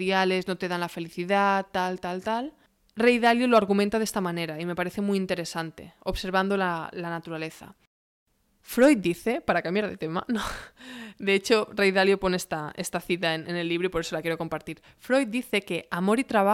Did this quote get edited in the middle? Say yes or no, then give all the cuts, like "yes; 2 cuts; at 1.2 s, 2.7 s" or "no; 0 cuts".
no; 0 cuts